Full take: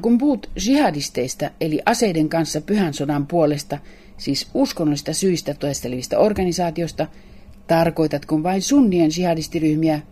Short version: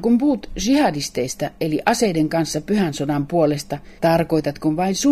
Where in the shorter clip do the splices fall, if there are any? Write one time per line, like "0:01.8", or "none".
0:04.0

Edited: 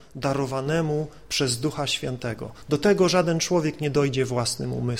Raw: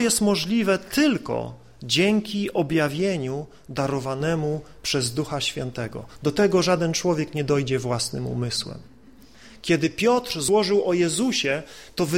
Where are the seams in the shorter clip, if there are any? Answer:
none

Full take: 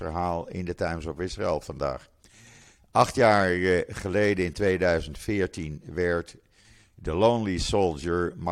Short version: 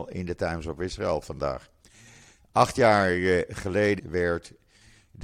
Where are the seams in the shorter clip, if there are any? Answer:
0:04.0

